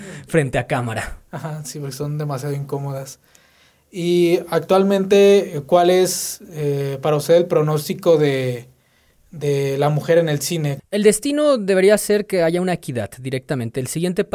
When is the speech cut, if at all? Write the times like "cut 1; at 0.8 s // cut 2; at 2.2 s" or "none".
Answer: cut 1; at 10.8 s